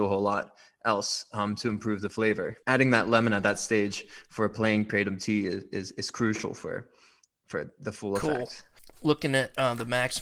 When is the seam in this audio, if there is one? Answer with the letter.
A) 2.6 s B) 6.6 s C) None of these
A